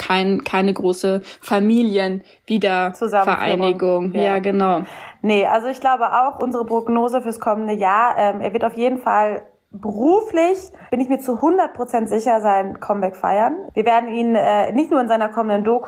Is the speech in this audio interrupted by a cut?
yes; 1 cut; at 10.9 s

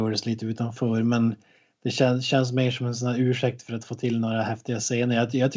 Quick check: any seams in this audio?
no; 0 cuts

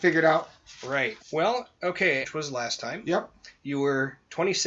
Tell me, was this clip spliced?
yes; 2 cuts; at 1.2 s, 2.2 s

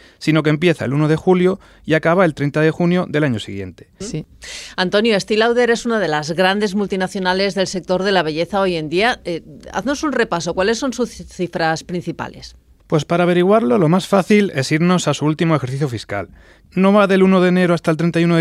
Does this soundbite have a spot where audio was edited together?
yes; 2 cuts; at 4.0 s, 16.7 s

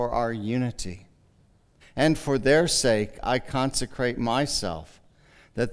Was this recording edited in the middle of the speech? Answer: yes; 1 cut; at 1.8 s

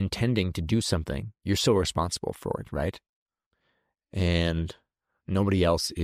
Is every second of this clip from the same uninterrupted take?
yes; 0 cuts

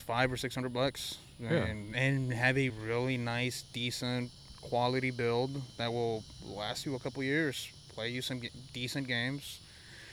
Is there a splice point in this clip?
no; 0 cuts

